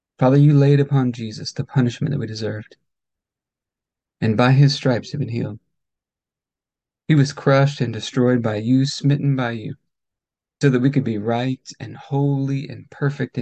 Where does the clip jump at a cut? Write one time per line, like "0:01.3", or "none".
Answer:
0:10.6